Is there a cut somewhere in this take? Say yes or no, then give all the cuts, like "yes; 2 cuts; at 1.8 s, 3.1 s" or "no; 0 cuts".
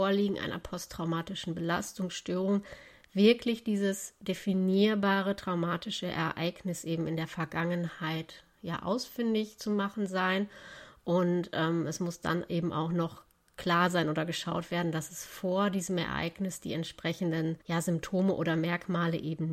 yes; 1 cut; at 17.6 s